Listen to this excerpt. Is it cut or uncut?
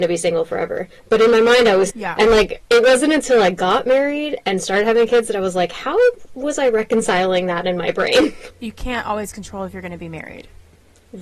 cut